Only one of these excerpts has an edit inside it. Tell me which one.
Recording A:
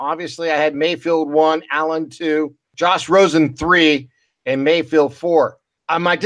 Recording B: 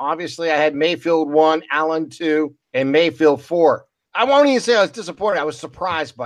B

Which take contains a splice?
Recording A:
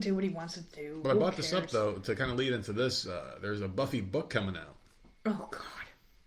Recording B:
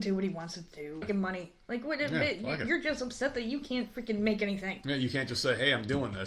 B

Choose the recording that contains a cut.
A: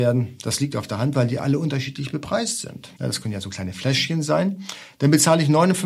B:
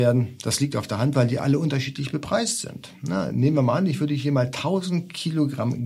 A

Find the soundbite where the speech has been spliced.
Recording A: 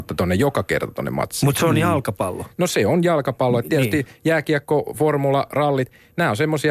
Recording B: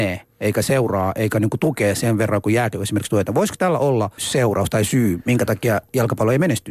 B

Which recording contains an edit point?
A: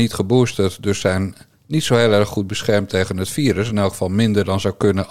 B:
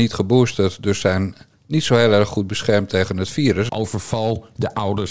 B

